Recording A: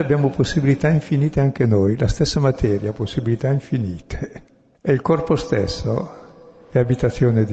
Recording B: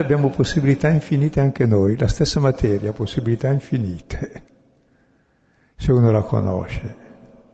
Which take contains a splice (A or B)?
A